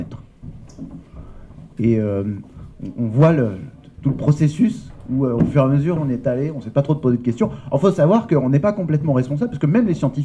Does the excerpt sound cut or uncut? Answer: cut